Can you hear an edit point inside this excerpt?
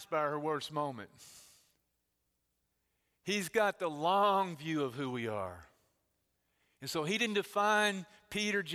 no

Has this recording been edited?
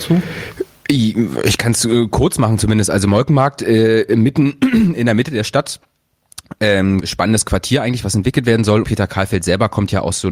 yes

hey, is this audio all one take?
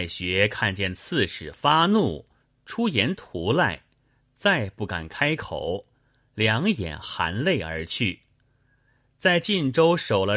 yes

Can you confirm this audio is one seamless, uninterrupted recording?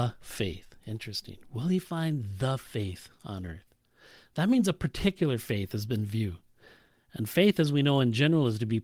yes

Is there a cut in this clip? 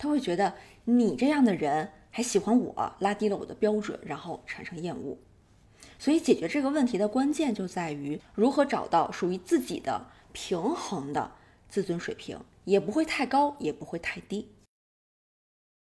no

